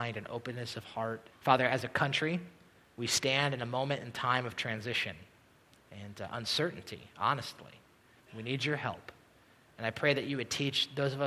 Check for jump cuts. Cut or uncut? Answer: cut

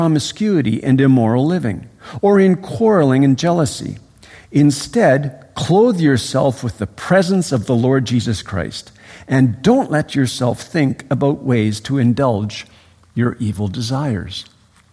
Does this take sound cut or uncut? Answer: uncut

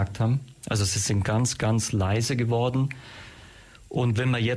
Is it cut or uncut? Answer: uncut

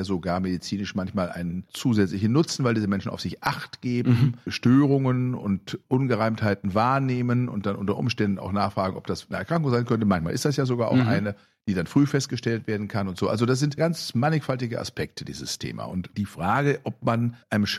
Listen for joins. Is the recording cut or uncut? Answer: uncut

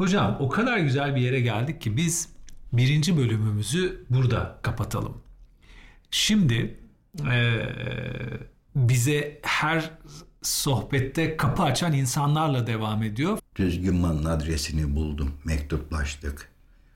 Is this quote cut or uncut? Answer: cut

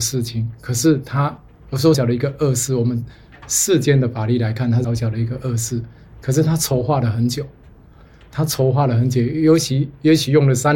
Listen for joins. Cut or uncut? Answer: cut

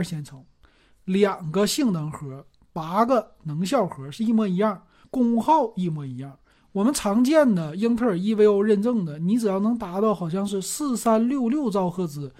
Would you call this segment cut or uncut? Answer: cut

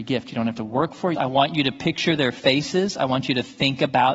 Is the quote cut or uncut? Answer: cut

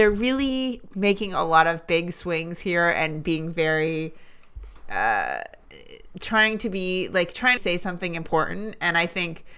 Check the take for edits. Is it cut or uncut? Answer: cut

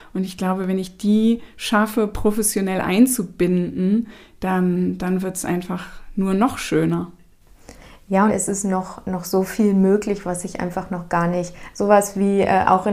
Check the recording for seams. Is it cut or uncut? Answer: cut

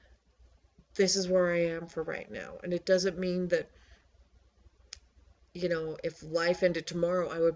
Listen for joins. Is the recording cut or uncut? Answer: uncut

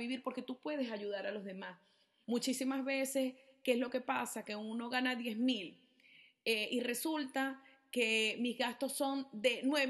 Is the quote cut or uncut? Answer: cut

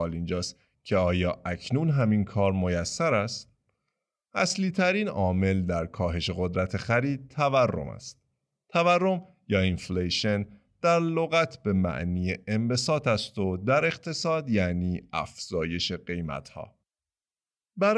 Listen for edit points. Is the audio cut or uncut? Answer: uncut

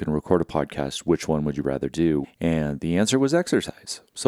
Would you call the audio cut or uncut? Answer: cut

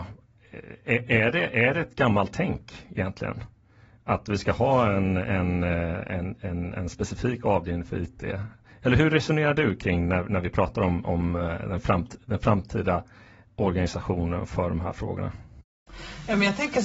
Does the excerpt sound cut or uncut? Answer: uncut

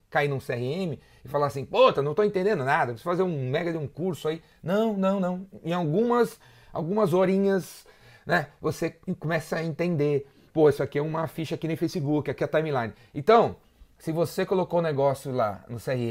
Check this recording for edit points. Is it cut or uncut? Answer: uncut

